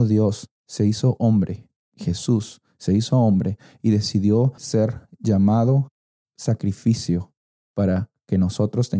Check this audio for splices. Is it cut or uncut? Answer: cut